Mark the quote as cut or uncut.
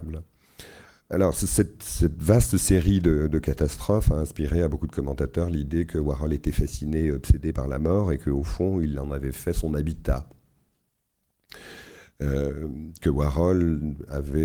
uncut